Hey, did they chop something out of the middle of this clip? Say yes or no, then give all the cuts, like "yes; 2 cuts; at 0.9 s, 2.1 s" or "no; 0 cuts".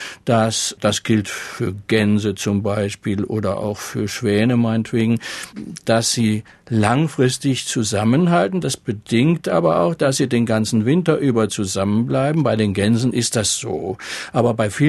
no; 0 cuts